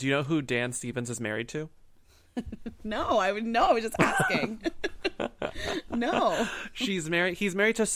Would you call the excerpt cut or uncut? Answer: uncut